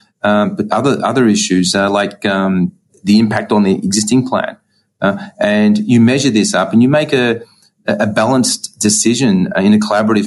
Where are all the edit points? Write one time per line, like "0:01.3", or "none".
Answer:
0:02.9